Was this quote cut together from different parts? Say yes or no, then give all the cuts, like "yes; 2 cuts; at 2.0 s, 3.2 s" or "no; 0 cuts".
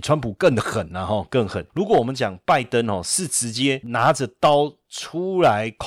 no; 0 cuts